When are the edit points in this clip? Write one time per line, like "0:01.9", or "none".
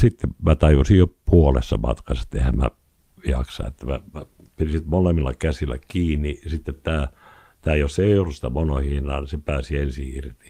none